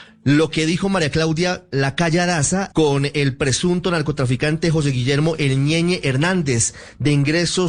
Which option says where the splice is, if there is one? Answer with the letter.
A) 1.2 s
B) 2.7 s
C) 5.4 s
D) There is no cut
B